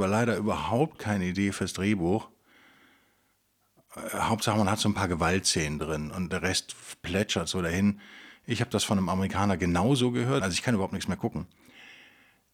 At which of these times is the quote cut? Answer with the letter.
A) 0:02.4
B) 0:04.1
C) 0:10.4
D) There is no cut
C